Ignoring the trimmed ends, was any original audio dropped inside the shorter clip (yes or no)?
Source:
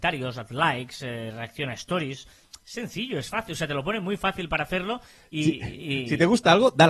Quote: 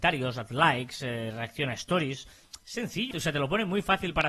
yes